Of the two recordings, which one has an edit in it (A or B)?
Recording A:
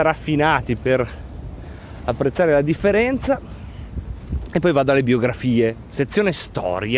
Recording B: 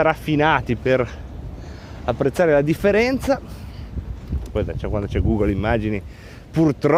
B